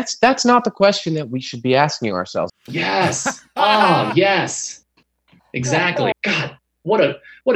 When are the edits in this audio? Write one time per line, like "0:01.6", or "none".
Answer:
0:02.5
0:06.1

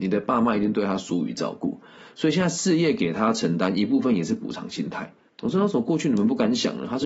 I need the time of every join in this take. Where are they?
0:05.3

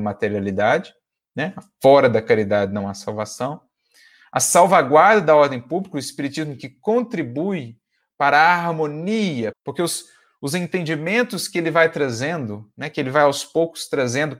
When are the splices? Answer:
0:09.5

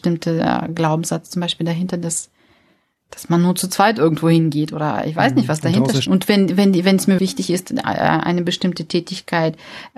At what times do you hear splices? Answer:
0:06.1
0:07.2

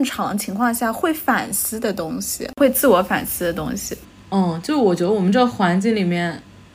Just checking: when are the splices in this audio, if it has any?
none

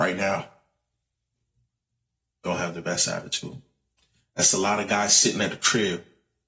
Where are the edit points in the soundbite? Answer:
none

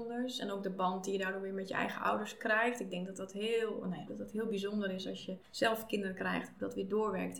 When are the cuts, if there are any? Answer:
0:04.1
0:05.4

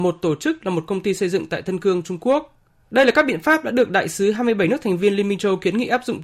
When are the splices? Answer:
0:02.8

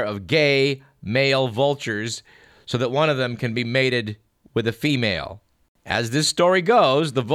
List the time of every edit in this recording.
none

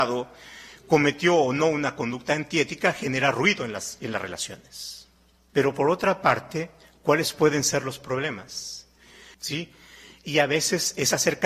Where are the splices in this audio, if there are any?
0:05.5
0:09.3

